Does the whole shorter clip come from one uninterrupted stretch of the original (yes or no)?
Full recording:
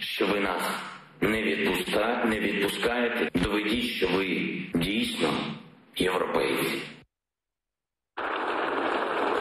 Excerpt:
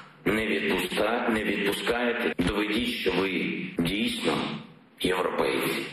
yes